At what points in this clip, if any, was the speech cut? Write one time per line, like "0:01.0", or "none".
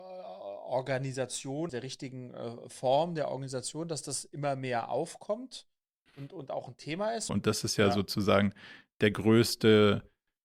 0:01.7
0:07.3